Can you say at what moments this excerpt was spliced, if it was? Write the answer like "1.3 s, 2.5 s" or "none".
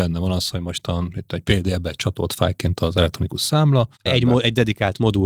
4.1 s